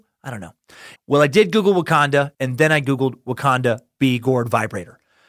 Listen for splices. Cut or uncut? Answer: cut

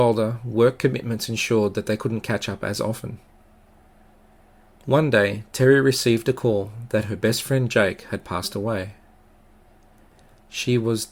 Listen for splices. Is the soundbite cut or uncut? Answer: uncut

